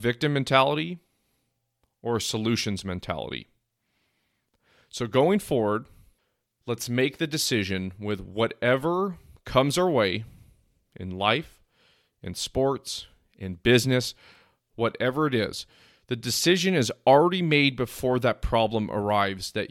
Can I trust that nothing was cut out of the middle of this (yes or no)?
yes